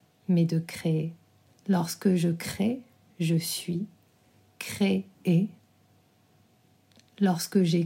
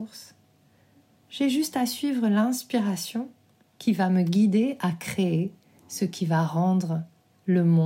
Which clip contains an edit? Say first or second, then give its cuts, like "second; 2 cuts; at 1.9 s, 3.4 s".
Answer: first; 2 cuts; at 1.5 s, 5.1 s